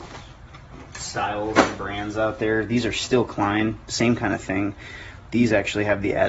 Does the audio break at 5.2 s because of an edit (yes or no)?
no